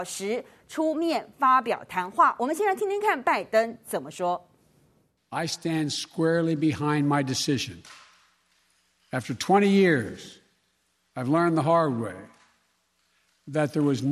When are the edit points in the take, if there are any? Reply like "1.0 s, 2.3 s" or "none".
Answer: none